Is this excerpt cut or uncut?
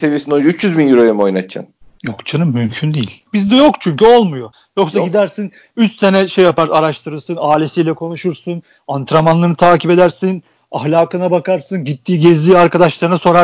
cut